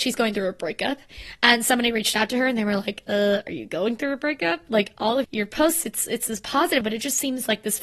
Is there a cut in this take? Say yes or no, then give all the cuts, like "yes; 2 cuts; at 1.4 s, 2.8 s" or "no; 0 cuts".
yes; 2 cuts; at 5.2 s, 6.8 s